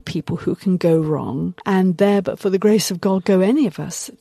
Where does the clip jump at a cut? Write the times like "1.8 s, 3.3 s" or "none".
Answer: 1.6 s